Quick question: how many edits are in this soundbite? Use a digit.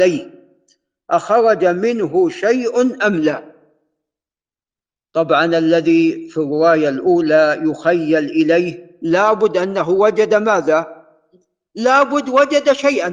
0